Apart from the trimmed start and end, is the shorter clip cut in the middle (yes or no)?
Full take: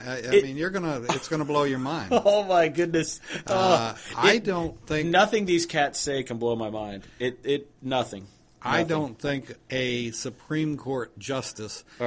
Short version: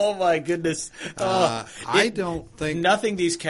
no